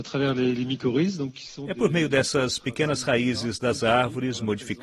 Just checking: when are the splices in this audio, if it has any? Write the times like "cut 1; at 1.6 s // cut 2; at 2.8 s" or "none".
none